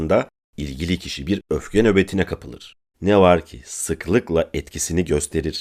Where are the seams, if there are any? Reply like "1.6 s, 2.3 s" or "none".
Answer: 2.9 s